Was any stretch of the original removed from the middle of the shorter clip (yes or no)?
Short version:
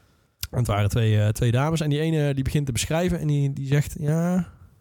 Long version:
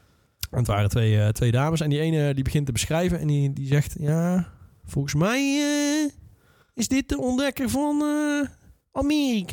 no